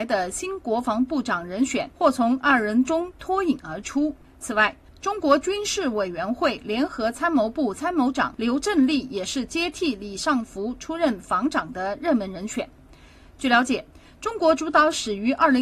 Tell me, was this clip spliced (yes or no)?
no